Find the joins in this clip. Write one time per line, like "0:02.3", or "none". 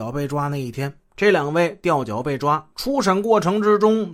0:01.1
0:02.7